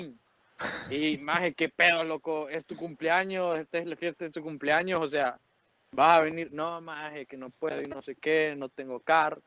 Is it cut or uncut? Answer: uncut